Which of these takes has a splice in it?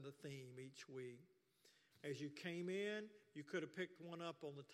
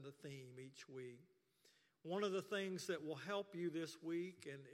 first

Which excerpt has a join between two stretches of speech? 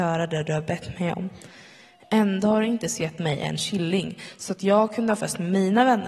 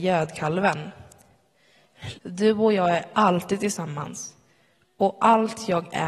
second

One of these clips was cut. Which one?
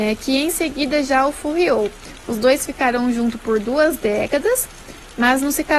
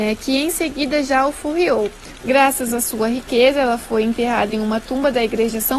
second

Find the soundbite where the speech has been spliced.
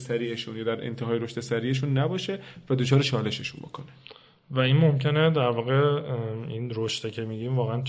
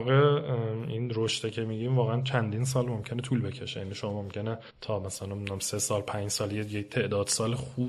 second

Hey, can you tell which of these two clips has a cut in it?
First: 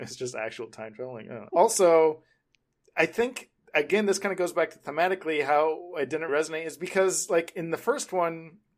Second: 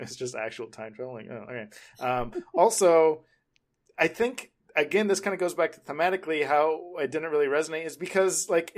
first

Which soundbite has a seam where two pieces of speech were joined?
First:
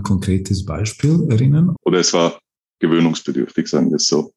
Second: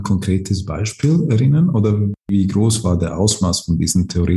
first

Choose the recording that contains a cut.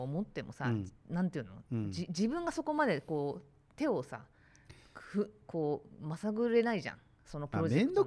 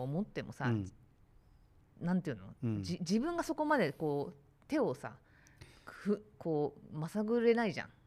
first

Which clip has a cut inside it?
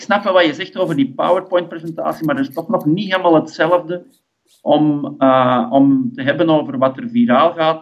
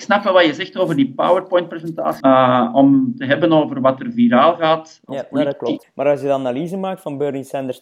second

